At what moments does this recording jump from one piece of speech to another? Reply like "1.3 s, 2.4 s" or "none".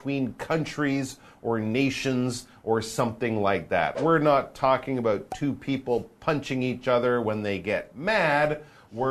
none